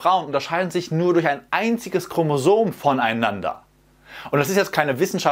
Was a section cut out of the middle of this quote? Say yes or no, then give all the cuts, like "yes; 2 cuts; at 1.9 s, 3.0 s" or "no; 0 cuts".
no; 0 cuts